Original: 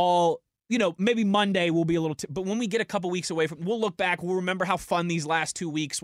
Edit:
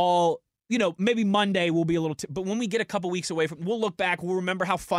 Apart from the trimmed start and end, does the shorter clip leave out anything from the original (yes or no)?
no